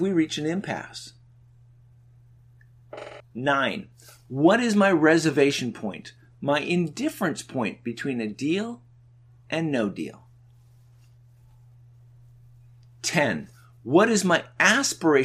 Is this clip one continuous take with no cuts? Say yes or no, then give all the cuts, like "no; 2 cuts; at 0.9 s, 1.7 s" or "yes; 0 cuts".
no; 1 cut; at 3.2 s